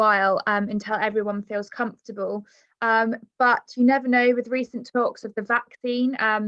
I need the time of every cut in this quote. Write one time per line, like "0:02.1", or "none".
none